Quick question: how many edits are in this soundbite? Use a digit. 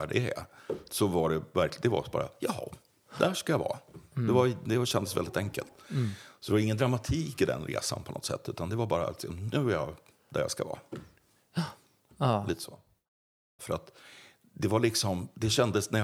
1